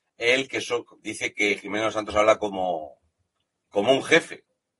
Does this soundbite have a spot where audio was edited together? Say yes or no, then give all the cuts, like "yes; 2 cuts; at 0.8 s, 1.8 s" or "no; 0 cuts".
yes; 1 cut; at 3.6 s